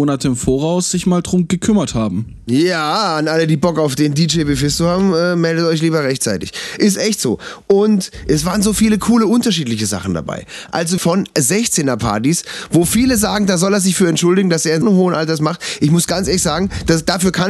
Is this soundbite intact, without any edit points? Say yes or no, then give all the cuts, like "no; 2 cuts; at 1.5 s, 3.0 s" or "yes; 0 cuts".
no; 2 cuts; at 11.0 s, 14.8 s